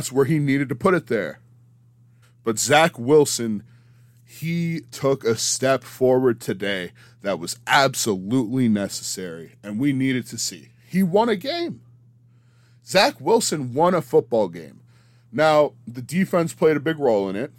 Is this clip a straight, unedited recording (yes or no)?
no